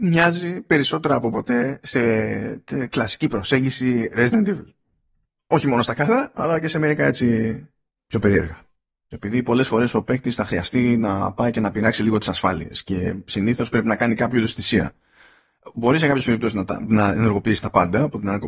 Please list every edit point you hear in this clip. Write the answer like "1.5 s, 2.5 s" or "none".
9.1 s

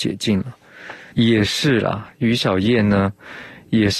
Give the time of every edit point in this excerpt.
1.1 s

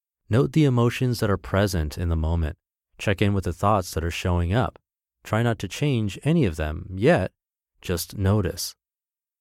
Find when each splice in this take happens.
none

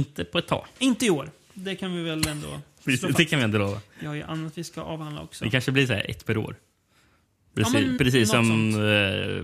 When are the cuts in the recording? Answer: 8.0 s

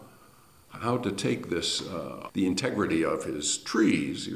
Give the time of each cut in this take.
2.3 s

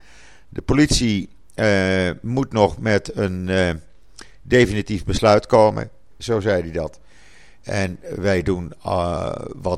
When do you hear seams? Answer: 6.1 s

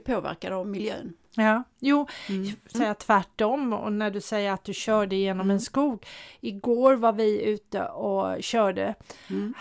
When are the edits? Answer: 2.7 s

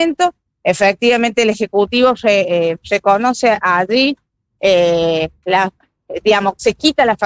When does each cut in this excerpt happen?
none

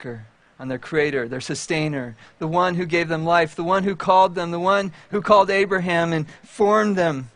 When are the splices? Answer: none

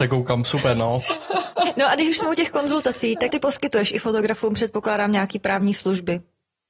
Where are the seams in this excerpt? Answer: 3.3 s

